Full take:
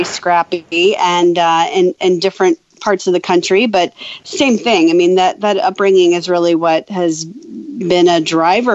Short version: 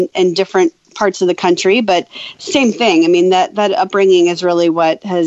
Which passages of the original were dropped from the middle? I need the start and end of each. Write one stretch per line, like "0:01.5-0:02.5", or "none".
none